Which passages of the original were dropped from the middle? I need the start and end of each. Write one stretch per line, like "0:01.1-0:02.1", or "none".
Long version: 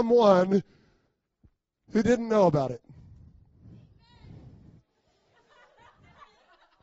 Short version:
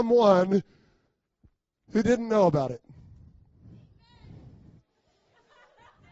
none